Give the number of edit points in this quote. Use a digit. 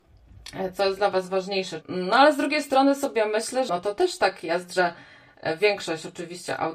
2